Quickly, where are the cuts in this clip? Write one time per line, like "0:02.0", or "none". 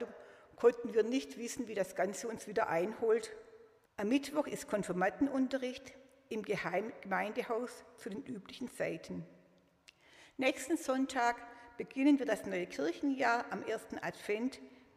0:03.8